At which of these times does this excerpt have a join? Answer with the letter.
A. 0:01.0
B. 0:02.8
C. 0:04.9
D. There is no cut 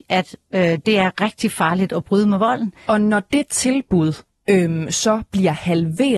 B